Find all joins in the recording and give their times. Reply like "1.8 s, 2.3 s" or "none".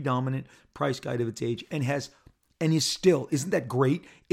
none